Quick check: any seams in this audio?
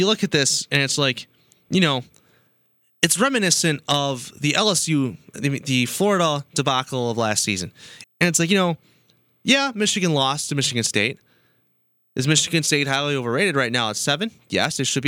yes; 1 cut; at 8.0 s

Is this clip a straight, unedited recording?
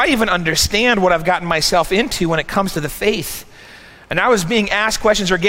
yes; 0 cuts

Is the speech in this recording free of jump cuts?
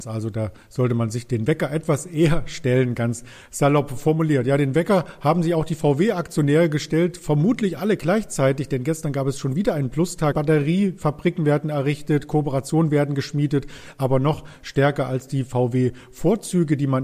no; 1 cut; at 10.3 s

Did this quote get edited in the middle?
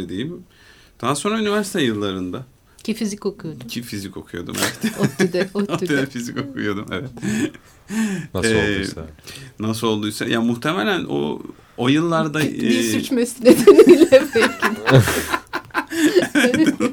no; 0 cuts

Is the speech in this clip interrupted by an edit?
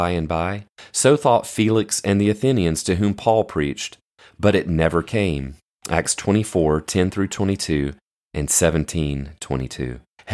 no; 0 cuts

